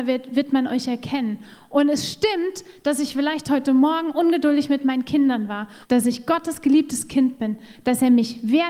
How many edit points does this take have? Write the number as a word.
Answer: one